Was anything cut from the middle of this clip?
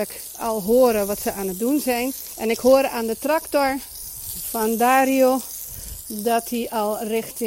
yes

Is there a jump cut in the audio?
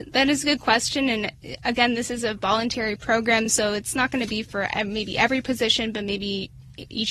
no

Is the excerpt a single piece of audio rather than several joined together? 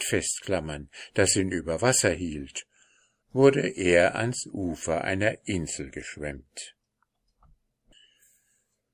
no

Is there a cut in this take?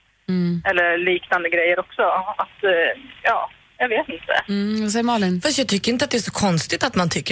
no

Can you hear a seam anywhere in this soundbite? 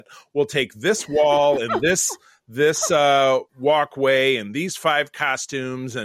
yes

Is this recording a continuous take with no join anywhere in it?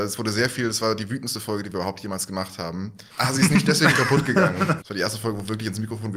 no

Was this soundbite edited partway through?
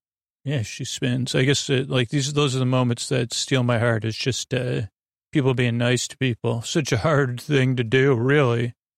no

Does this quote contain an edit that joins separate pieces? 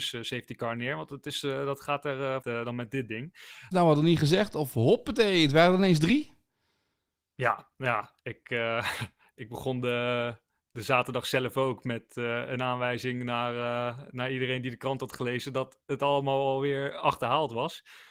yes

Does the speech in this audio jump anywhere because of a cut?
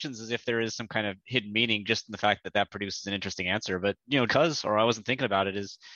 yes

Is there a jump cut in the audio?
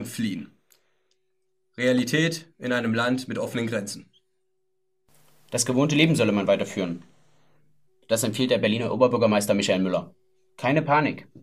yes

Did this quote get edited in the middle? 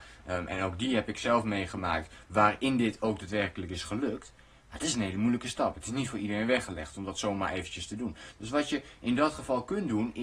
yes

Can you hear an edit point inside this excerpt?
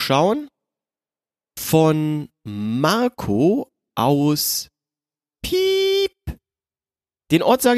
no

